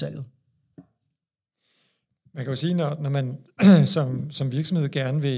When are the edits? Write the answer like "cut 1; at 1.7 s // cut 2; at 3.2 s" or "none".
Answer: none